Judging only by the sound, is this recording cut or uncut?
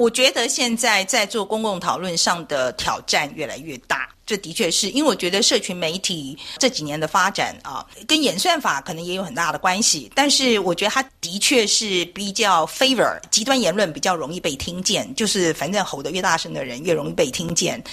uncut